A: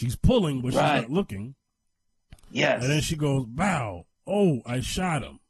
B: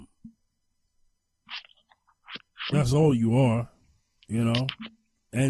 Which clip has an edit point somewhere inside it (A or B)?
B